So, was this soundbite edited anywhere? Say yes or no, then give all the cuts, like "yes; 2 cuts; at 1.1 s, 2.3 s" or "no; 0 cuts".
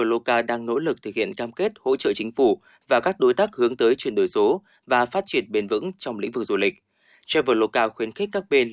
no; 0 cuts